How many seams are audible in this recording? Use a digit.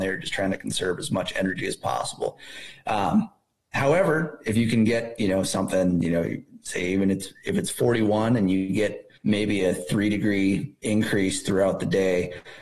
2